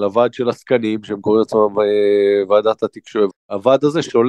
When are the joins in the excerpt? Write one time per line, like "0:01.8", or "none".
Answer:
0:03.3

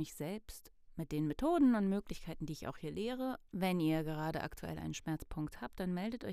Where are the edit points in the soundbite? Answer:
0:03.5

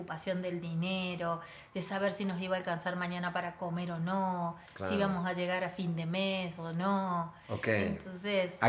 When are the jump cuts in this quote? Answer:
none

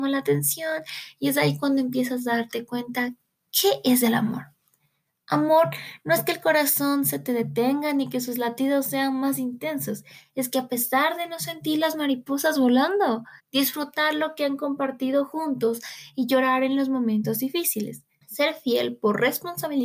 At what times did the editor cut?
0:13.4
0:18.2

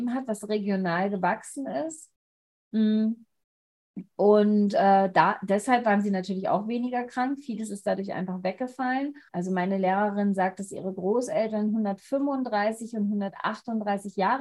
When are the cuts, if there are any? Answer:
0:09.3

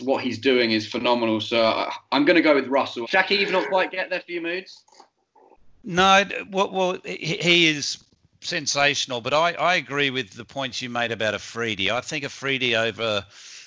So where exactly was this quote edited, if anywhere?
0:03.0

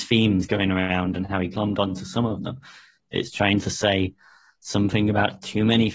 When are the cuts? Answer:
0:03.1

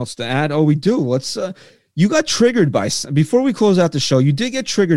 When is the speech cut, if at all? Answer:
none

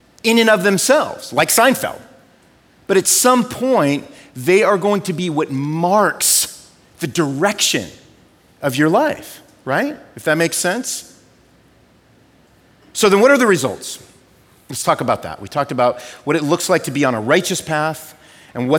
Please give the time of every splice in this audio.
none

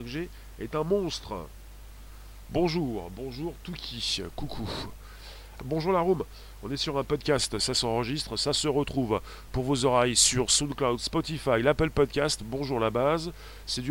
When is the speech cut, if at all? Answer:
0:02.5
0:05.6

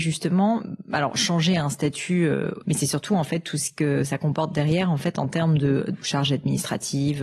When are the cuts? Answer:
0:02.6
0:06.0

